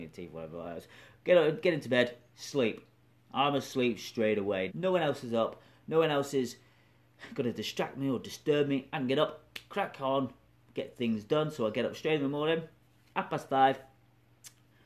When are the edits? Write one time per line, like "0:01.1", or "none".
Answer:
0:04.7